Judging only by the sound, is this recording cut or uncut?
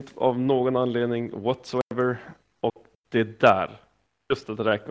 cut